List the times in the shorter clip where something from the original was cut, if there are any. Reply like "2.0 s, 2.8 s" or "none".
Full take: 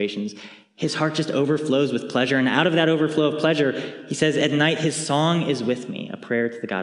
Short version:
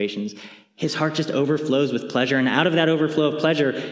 none